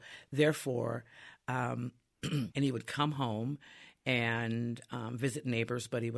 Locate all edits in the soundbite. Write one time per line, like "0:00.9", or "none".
0:02.5